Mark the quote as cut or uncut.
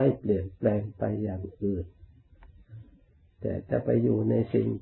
uncut